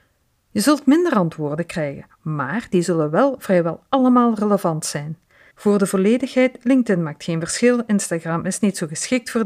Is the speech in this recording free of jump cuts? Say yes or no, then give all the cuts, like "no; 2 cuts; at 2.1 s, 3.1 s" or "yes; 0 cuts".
no; 1 cut; at 5.5 s